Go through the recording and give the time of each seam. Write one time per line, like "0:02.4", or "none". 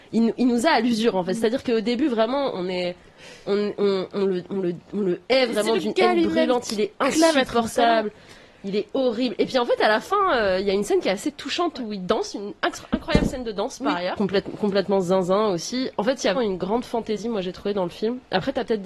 0:14.2
0:16.3